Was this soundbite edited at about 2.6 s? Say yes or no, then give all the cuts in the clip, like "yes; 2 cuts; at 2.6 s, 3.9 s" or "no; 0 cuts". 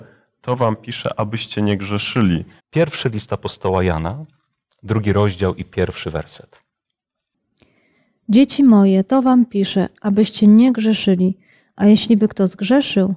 yes; 1 cut; at 2.6 s